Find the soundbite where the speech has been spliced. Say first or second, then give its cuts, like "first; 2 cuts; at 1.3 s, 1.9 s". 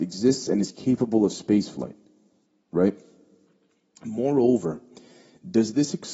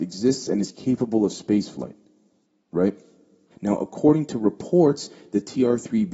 second; 1 cut; at 3.5 s